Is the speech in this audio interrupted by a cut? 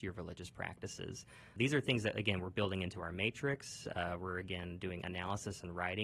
no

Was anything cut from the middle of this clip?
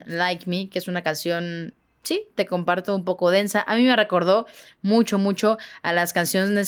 no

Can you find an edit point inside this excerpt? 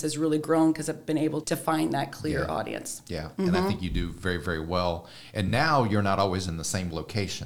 yes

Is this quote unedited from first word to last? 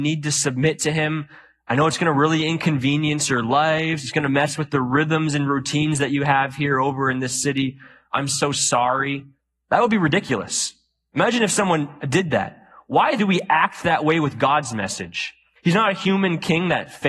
no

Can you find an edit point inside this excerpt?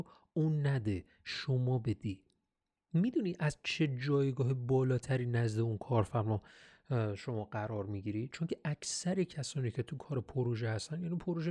no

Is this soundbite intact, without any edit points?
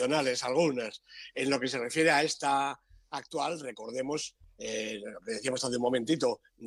yes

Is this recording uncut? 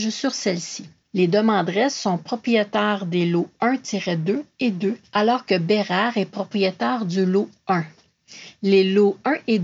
no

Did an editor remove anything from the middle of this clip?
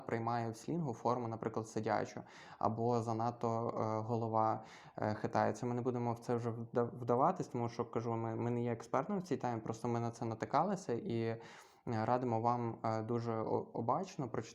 no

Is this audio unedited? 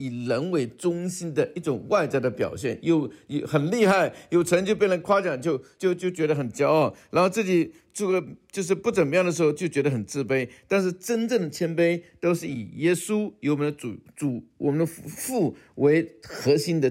yes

